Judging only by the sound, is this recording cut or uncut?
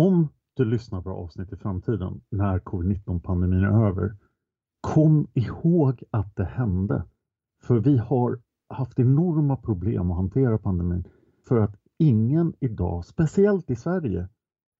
cut